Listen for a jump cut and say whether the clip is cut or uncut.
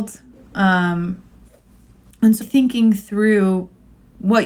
cut